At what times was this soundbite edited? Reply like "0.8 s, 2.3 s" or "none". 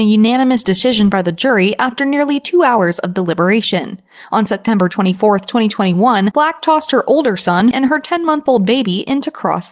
7.7 s